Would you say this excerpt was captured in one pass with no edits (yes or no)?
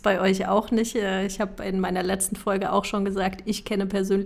yes